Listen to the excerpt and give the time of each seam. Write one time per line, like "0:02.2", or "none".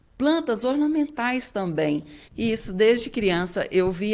0:02.3